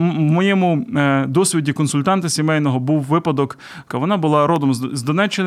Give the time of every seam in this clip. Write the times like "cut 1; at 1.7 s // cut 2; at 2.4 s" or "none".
cut 1; at 3.9 s